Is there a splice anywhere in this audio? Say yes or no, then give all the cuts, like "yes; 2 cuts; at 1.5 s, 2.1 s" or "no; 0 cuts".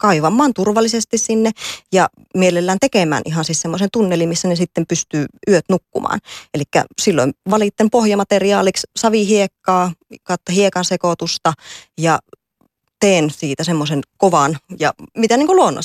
yes; 1 cut; at 14.1 s